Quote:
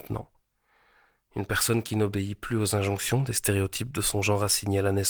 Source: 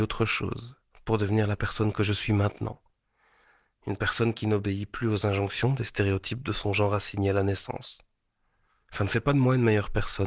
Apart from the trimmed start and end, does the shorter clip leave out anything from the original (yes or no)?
no